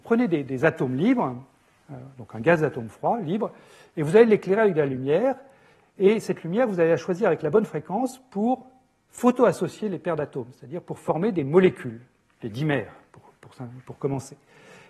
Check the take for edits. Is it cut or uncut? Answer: uncut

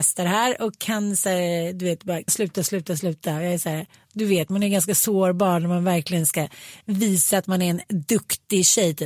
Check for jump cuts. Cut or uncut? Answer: cut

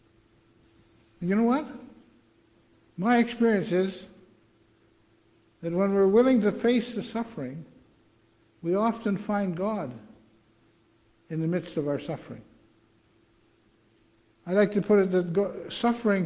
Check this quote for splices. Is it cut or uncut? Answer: uncut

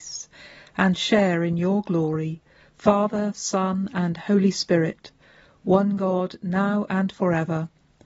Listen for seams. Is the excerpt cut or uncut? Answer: uncut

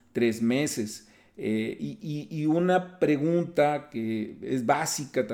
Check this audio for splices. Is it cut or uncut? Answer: uncut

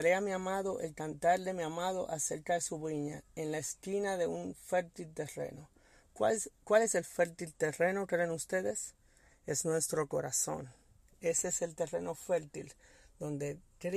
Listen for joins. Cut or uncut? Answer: uncut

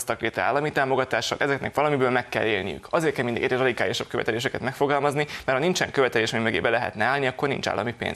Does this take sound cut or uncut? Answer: uncut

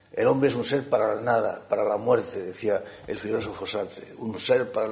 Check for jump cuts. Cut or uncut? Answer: uncut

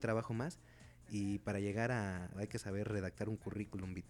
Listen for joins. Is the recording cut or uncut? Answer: cut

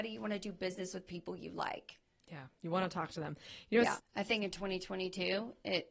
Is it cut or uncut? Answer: cut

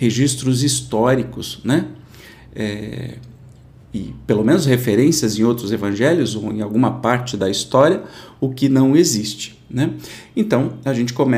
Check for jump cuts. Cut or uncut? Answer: uncut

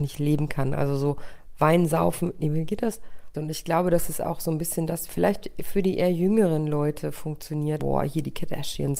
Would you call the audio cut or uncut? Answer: cut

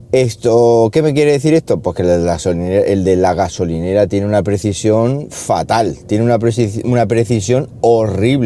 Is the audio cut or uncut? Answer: uncut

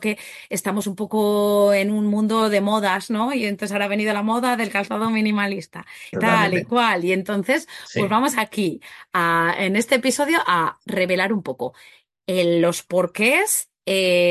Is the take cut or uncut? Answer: cut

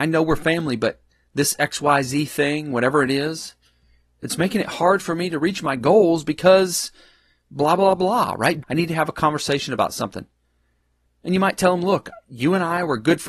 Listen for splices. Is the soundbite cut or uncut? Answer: cut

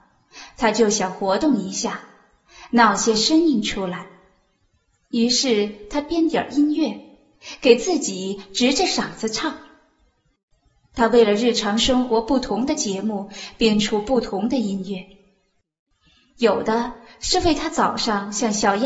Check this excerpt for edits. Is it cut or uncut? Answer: uncut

